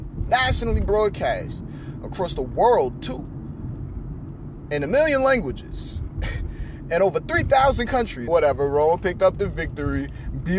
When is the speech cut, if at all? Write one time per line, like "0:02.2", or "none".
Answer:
0:08.3